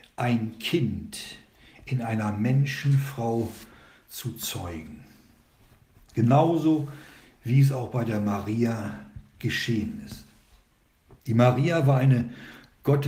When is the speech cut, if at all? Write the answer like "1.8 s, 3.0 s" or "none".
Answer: none